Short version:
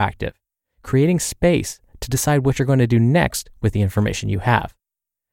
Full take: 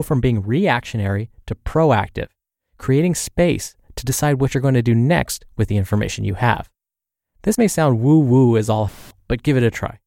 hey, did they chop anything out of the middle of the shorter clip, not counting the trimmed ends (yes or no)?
no